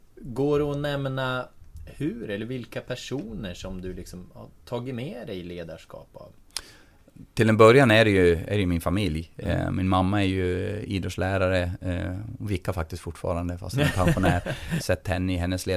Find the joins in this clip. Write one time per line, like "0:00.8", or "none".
0:14.8